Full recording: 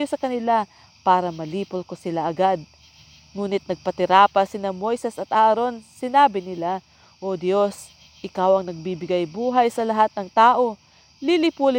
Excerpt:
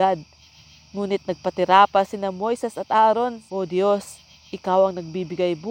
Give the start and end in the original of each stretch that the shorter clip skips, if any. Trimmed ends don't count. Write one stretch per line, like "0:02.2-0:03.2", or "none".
0:05.9-0:07.2